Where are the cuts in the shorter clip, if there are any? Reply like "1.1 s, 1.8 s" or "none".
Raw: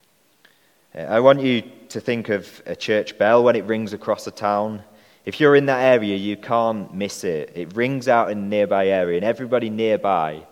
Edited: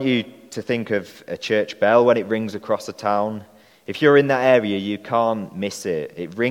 none